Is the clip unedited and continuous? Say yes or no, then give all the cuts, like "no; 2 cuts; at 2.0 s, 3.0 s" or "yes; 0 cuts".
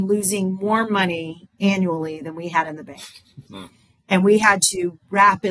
no; 1 cut; at 3.5 s